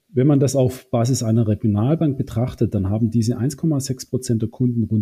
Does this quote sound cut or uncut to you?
uncut